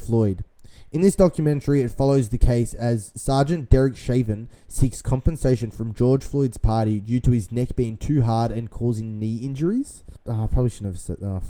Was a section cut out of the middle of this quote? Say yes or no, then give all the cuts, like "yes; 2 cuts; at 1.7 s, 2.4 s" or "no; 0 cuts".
yes; 1 cut; at 10.2 s